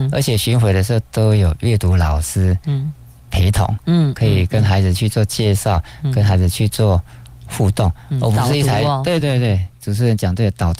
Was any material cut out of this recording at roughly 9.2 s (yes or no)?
yes